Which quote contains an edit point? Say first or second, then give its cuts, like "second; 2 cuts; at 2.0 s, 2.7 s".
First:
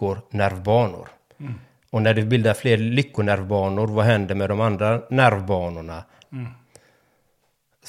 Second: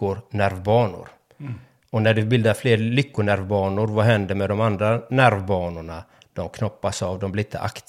first; 1 cut; at 6.2 s